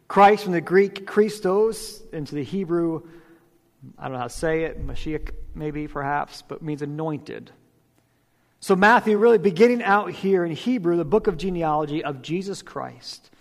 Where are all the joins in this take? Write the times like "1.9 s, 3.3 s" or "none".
none

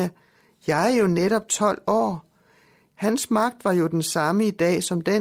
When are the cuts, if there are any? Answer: 2.9 s

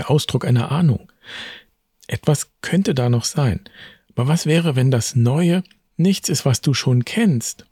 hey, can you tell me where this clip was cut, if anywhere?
none

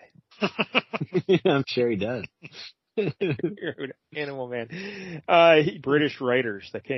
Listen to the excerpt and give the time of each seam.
5.8 s

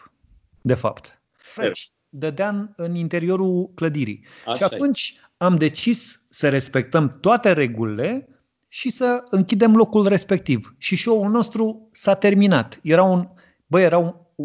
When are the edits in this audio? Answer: 1.6 s

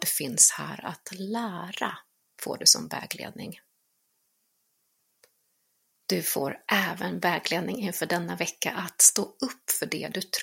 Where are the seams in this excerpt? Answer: none

